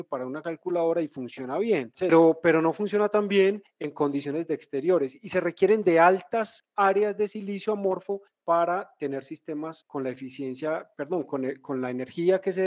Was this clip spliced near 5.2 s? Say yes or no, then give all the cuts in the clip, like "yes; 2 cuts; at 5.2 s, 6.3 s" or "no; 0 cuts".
no; 1 cut; at 1.9 s